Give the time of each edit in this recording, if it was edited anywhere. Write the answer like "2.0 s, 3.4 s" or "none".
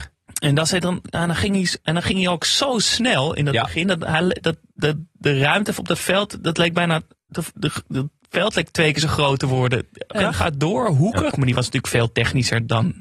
10.1 s, 11.3 s